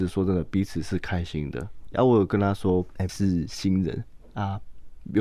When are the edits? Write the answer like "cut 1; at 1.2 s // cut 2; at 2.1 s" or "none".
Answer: cut 1; at 1.9 s // cut 2; at 3.1 s